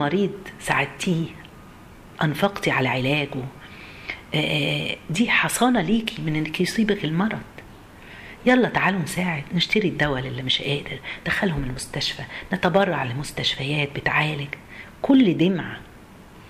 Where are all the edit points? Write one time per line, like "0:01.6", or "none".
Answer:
0:02.1